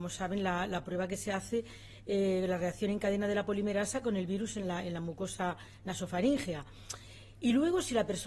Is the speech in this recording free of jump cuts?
yes; 0 cuts

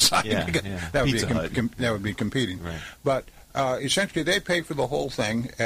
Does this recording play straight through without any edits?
no; 1 cut; at 1.5 s

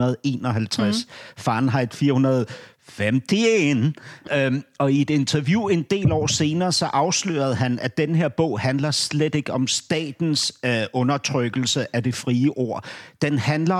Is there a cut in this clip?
yes; 1 cut; at 4.3 s

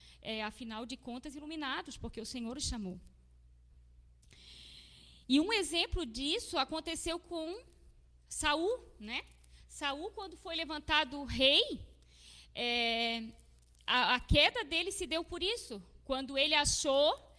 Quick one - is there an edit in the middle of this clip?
no; 0 cuts

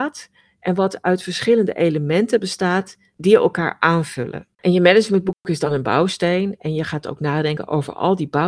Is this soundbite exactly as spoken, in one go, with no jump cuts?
no; 1 cut; at 4.5 s

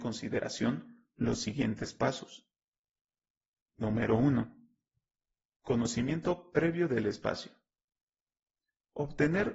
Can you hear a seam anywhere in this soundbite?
no; 0 cuts

